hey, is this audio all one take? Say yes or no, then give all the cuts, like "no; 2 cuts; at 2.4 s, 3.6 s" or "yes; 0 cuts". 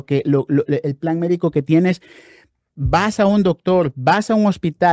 yes; 0 cuts